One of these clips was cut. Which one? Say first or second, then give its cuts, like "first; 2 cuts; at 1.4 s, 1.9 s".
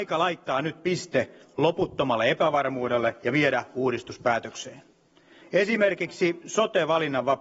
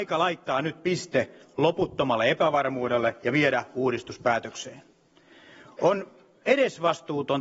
first; 1 cut; at 5.4 s